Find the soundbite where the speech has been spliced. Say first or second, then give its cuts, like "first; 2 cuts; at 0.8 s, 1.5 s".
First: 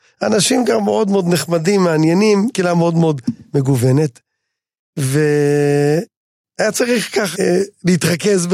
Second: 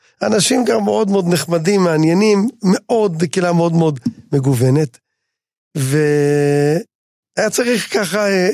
first; 2 cuts; at 2.5 s, 7.3 s